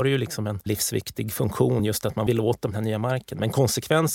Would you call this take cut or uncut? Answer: uncut